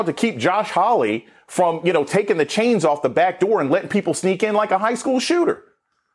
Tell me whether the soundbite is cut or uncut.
uncut